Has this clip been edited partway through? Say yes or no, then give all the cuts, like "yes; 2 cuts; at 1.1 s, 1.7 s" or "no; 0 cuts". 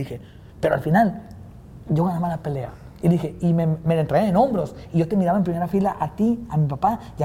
no; 0 cuts